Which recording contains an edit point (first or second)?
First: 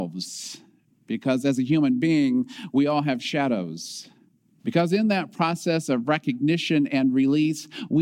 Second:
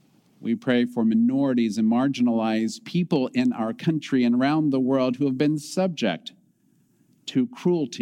first